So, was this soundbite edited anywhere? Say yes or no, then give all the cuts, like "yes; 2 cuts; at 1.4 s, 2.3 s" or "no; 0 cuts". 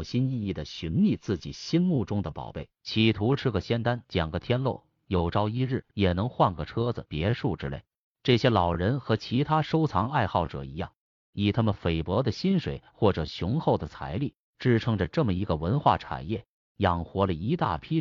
no; 0 cuts